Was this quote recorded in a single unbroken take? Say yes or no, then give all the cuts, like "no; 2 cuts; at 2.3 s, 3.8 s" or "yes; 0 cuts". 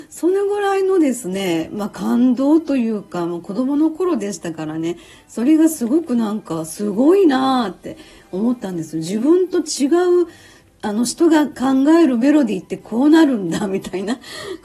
yes; 0 cuts